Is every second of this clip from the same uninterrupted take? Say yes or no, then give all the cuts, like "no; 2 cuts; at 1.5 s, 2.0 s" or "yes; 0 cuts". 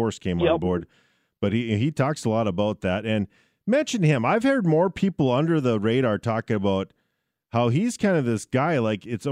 yes; 0 cuts